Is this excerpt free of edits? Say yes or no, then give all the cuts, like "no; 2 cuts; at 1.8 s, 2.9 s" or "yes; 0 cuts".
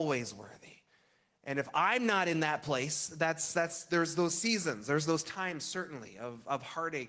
yes; 0 cuts